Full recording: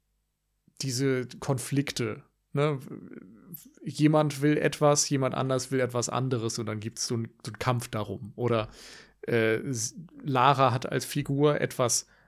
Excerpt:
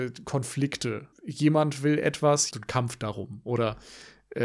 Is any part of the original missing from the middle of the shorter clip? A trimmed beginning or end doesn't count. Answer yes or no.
yes